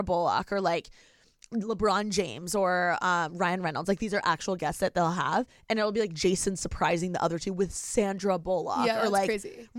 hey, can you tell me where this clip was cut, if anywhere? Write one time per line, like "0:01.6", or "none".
none